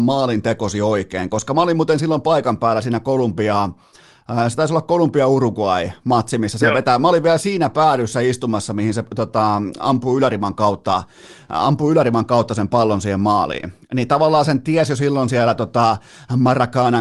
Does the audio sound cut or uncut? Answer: uncut